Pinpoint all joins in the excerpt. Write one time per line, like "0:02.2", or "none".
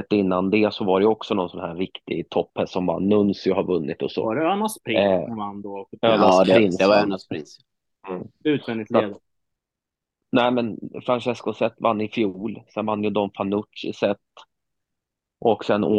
0:10.3